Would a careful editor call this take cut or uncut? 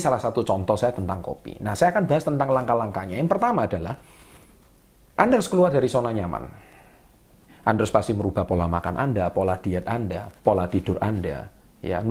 cut